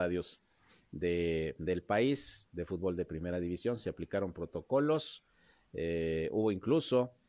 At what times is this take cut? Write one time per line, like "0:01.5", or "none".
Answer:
none